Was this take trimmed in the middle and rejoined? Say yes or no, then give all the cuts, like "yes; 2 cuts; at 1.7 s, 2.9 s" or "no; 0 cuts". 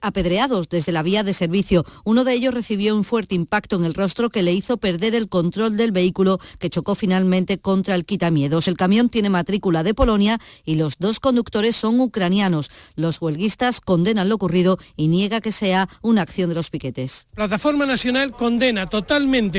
no; 0 cuts